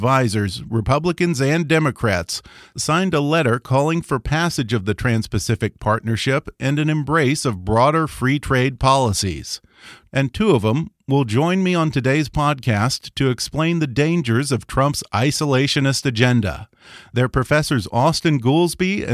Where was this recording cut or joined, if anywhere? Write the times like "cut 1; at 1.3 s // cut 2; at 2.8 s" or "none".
none